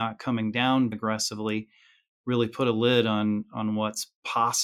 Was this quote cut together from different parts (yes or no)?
yes